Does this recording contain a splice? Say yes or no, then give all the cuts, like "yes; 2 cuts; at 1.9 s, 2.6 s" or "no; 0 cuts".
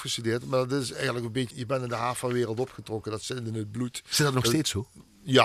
yes; 1 cut; at 1.5 s